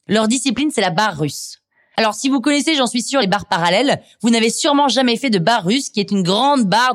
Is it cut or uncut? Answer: uncut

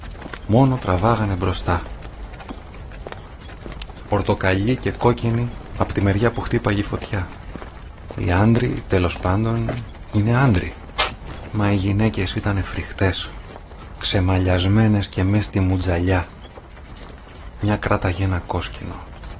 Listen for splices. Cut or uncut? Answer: cut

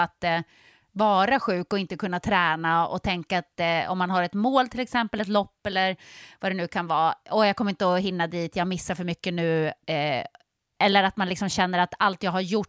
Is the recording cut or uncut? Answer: cut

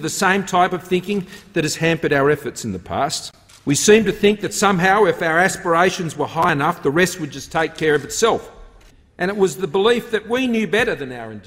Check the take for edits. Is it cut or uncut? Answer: uncut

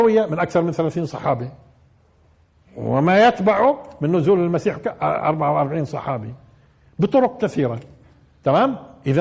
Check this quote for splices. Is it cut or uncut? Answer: cut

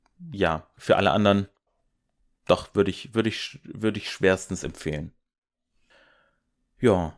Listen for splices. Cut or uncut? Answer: uncut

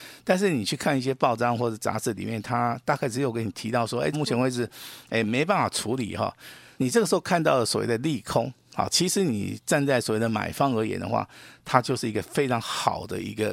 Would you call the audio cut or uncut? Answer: cut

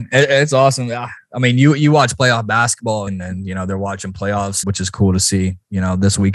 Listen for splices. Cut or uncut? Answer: cut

